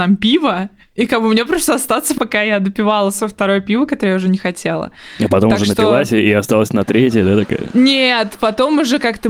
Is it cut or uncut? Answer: uncut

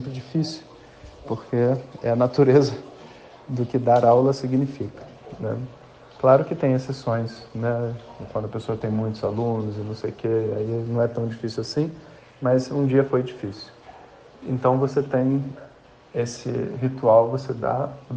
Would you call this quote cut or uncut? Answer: cut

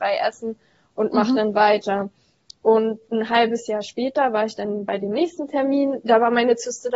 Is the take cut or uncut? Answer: uncut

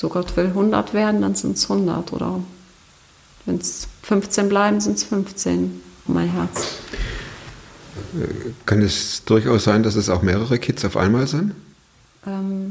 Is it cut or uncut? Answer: cut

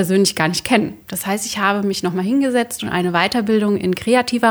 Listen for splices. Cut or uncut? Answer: cut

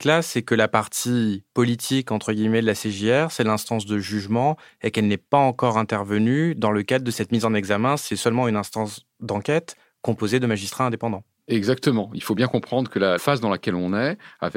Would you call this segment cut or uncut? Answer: uncut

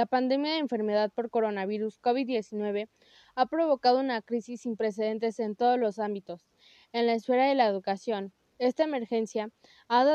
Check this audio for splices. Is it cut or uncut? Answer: uncut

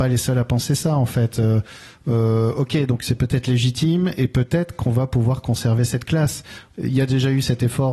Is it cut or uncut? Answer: uncut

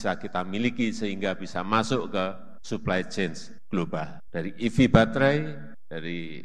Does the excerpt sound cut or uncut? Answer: uncut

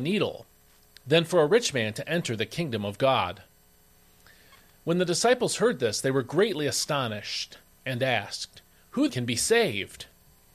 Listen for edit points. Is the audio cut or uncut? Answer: cut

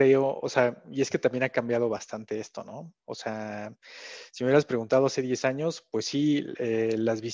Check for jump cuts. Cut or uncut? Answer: uncut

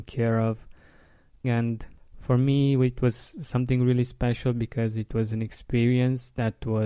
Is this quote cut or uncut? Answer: cut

